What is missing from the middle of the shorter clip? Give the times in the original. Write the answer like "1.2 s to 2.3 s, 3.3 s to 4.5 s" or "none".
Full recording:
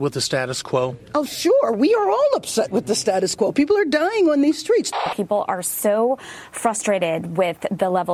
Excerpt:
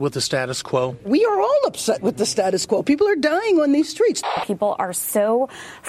1.0 s to 1.7 s